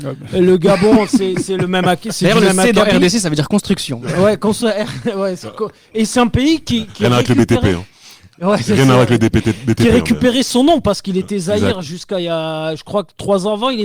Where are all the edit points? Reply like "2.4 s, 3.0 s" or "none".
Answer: none